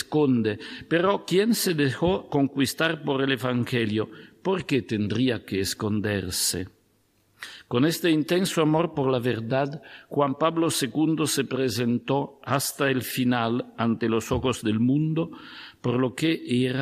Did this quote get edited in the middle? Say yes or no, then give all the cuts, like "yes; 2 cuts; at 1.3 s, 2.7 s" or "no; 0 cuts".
no; 0 cuts